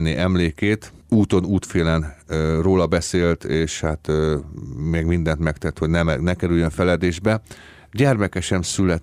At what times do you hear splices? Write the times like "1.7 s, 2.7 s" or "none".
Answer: none